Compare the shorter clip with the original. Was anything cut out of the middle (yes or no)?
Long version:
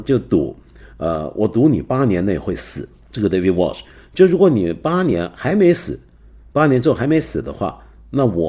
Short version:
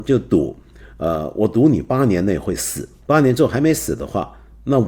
yes